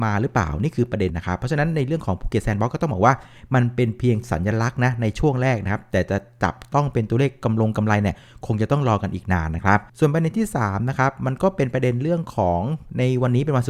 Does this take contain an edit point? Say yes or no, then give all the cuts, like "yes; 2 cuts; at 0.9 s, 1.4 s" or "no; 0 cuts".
yes; 2 cuts; at 1.1 s, 9.9 s